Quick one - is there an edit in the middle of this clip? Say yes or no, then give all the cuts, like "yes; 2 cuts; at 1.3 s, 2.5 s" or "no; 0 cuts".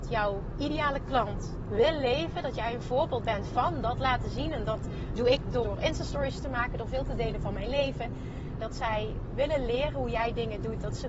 yes; 2 cuts; at 5.6 s, 8.6 s